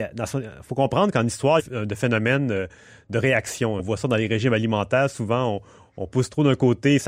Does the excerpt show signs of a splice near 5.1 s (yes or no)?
no